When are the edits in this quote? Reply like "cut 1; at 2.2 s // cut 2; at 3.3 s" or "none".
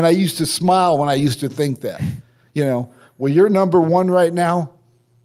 none